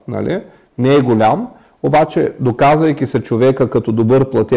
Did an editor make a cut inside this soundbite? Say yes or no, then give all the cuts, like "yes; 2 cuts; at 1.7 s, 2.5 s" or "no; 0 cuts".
no; 0 cuts